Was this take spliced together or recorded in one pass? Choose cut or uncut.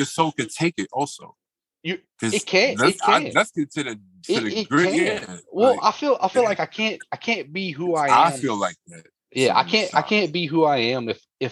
uncut